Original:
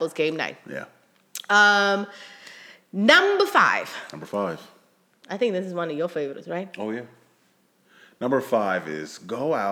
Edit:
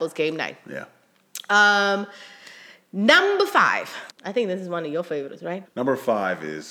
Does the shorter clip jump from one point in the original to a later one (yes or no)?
yes